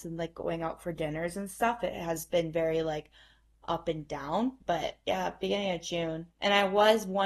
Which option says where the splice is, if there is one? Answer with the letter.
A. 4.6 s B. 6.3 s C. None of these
A